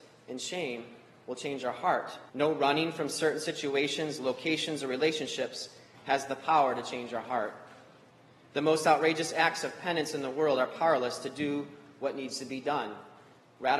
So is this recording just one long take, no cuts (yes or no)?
no